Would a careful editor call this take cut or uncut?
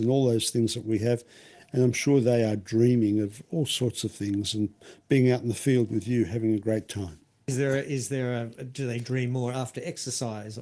uncut